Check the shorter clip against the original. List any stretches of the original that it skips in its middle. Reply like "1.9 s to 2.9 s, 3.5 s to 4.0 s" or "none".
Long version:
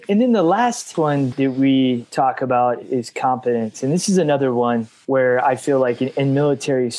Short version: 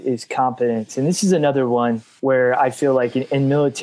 none